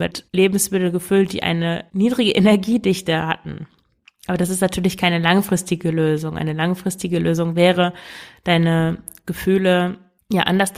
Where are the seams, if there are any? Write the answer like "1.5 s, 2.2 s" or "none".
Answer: none